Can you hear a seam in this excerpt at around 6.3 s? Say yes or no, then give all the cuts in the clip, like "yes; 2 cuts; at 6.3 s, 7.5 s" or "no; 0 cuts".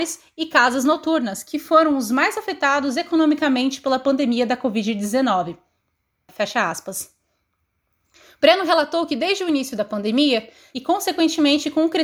yes; 2 cuts; at 6.3 s, 10.7 s